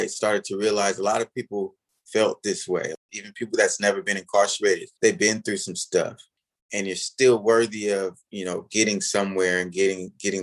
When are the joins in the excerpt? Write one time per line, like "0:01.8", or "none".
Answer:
0:05.0